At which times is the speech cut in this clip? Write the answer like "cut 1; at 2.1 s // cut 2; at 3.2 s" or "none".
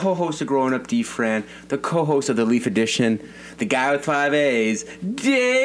none